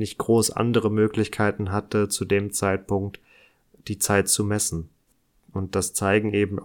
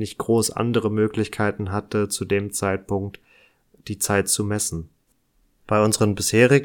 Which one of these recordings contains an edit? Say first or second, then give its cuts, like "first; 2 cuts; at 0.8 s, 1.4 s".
first; 1 cut; at 5.4 s